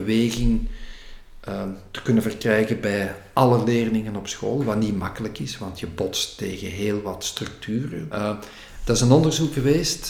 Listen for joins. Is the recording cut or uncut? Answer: cut